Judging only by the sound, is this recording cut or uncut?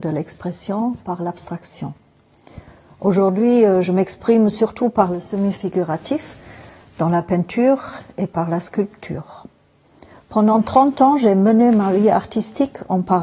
uncut